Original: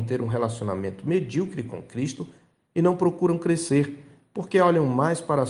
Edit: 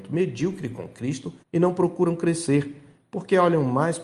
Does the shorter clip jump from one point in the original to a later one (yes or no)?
yes